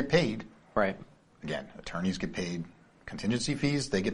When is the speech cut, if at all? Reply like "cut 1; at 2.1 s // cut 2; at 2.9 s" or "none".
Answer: none